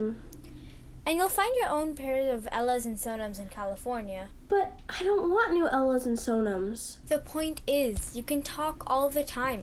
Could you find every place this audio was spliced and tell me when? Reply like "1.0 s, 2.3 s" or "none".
1.0 s, 7.0 s